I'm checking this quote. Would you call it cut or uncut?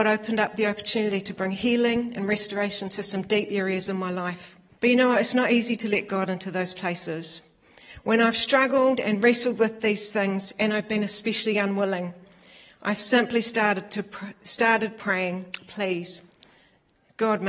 cut